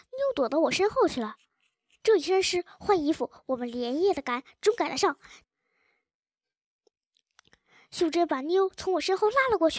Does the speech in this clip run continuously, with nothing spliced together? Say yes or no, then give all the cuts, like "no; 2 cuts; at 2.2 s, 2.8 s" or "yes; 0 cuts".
no; 2 cuts; at 2.0 s, 5.4 s